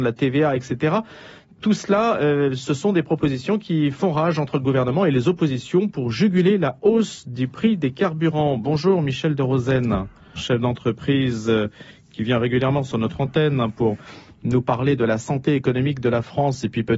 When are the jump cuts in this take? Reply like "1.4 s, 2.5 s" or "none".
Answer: 10.3 s